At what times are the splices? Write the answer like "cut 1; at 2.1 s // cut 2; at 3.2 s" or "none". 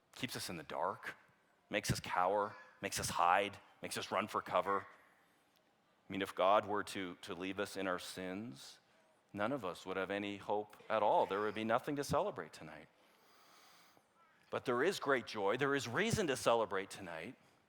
none